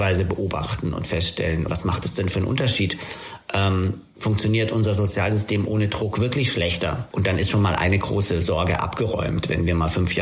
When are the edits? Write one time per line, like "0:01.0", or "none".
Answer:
0:01.7
0:07.1